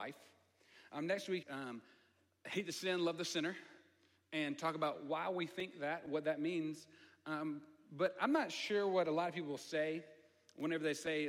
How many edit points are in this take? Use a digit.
1